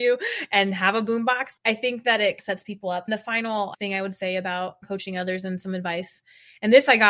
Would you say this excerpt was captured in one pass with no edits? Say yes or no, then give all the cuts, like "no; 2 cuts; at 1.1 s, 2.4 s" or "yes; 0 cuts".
yes; 0 cuts